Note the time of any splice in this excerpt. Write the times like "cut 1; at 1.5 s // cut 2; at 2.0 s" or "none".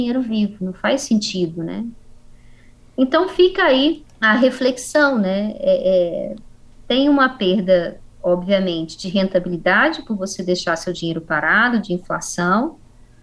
cut 1; at 4.1 s